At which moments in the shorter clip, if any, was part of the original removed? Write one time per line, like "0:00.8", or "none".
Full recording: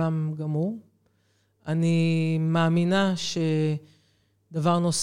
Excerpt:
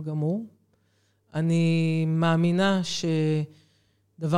none

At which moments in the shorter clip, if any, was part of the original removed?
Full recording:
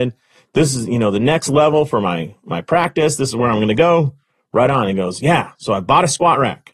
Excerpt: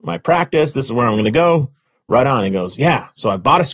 none

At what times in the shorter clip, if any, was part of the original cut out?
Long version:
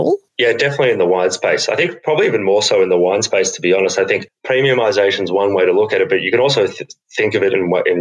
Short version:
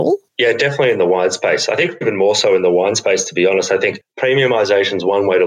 0:02.0

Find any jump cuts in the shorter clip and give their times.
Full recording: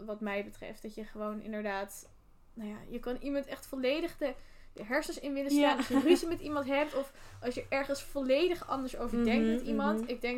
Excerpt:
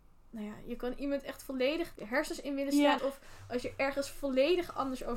0:01.9
0:03.0

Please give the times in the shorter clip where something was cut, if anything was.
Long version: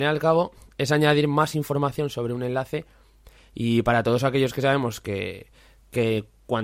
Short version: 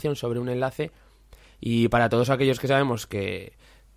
none

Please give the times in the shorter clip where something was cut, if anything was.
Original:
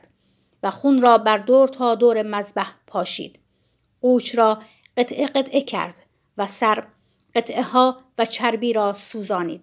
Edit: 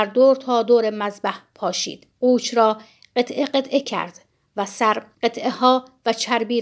0:02.1
0:05.1

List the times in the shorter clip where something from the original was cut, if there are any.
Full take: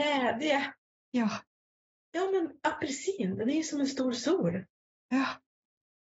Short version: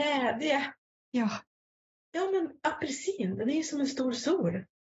none

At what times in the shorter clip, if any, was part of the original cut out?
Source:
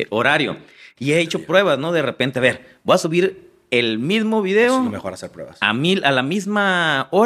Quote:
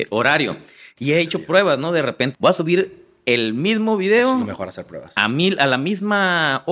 0:02.3

